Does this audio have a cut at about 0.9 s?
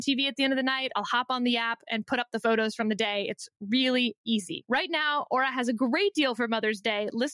no; 0 cuts

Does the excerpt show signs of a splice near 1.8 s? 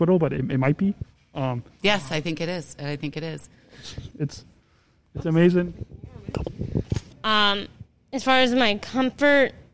no; 2 cuts; at 4.1 s, 7.1 s

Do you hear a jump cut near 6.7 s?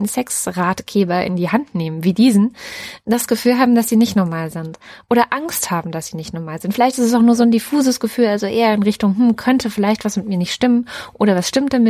no; 0 cuts

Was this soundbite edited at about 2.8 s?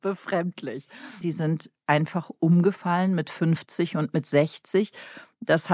no; 1 cut; at 1.2 s

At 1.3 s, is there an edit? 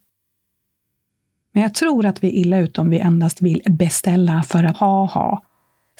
no; 1 cut; at 4.7 s

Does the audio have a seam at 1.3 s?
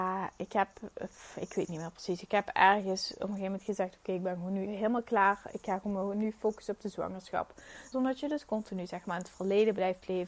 no; 2 cuts; at 4.7 s, 7.9 s

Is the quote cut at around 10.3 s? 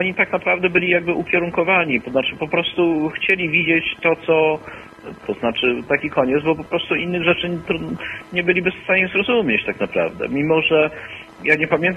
no; 1 cut; at 5.2 s

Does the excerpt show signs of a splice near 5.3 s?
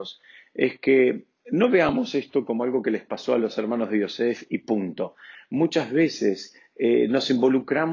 yes; 1 cut; at 5.3 s

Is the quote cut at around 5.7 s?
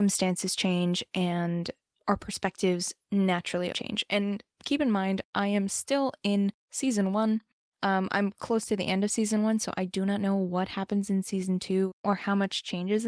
no; 1 cut; at 3.7 s

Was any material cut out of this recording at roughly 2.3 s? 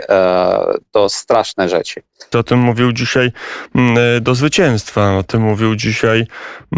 yes; 1 cut; at 2.3 s

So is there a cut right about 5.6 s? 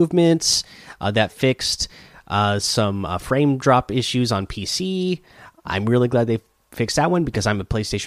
yes; 1 cut; at 5.6 s

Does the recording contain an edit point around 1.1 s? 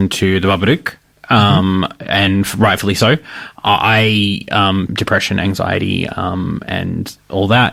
no; 1 cut; at 4.9 s

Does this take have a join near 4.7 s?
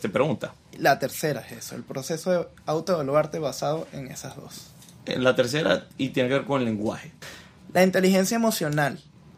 no; 1 cut; at 7.2 s

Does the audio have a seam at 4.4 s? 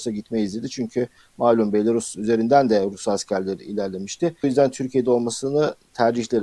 yes; 1 cut; at 4.4 s

